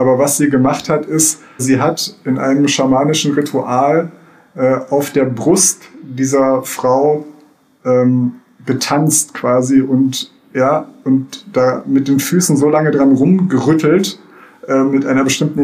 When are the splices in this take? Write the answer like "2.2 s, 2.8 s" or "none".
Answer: 1.6 s